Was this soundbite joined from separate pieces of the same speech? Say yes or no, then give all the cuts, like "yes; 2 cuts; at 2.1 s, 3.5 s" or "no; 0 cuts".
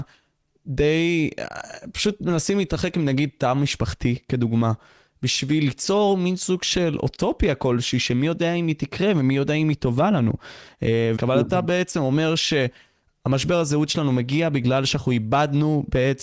yes; 1 cut; at 11.2 s